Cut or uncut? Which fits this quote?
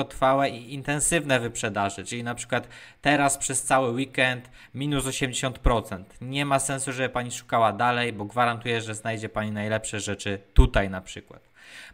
uncut